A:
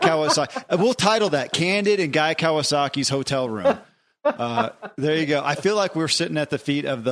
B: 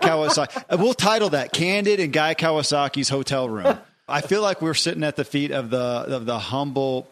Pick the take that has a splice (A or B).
B